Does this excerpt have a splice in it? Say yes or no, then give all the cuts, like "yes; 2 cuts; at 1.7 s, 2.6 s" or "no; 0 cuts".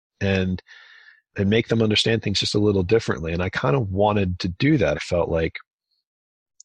yes; 1 cut; at 4.9 s